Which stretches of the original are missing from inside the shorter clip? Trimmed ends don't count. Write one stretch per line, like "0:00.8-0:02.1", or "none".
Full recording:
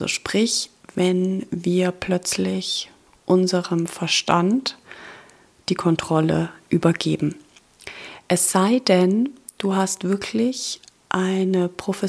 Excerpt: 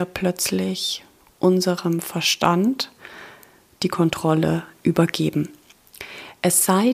none